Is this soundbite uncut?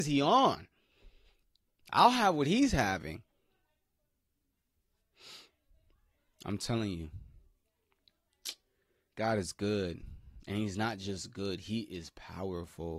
yes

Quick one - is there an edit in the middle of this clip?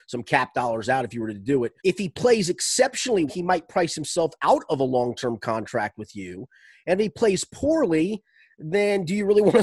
yes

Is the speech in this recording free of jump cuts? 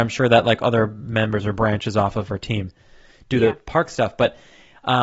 yes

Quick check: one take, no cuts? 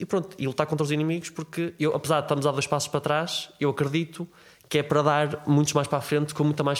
yes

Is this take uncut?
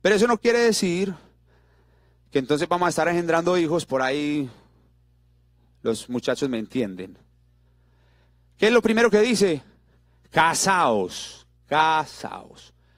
yes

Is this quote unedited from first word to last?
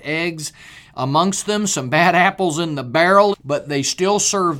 no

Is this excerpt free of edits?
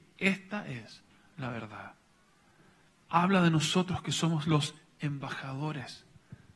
no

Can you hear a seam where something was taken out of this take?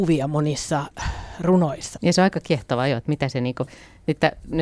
yes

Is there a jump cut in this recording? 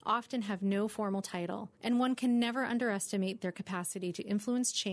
yes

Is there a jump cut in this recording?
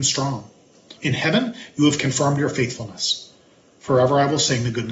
yes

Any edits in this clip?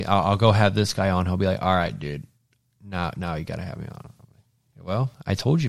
no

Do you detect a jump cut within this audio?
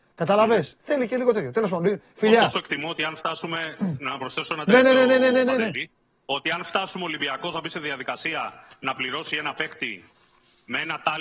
no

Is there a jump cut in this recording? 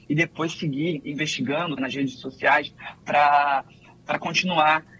yes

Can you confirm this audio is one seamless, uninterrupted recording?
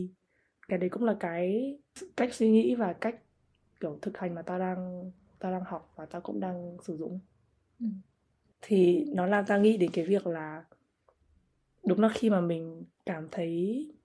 no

